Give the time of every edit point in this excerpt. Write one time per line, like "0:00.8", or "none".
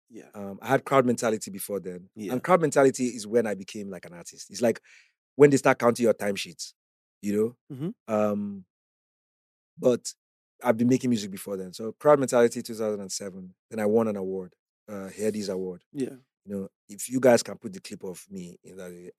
none